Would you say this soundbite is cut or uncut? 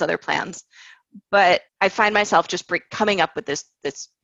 cut